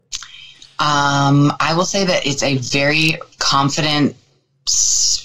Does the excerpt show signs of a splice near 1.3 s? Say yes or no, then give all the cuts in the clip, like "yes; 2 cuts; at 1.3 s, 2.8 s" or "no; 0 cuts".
no; 1 cut; at 3.3 s